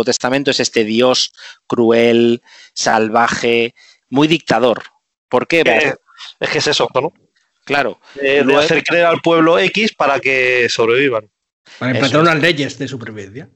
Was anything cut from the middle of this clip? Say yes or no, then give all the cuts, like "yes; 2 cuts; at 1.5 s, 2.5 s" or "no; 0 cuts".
yes; 3 cuts; at 4.0 s, 5.7 s, 6.9 s